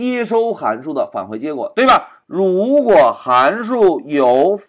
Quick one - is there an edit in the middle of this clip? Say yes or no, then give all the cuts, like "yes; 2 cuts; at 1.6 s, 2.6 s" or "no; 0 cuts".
yes; 1 cut; at 2.2 s